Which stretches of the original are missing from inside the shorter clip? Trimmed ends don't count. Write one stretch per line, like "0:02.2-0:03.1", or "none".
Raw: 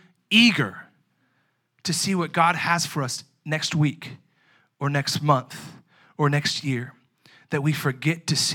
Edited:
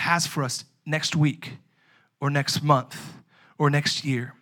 none